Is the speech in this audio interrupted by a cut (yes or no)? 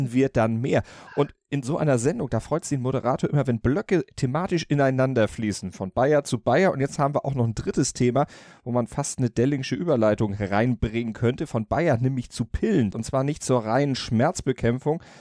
yes